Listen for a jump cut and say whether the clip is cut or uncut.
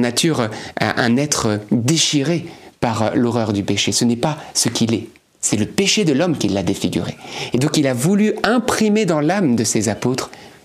uncut